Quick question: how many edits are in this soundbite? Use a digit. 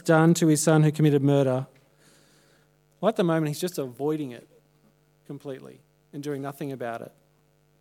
0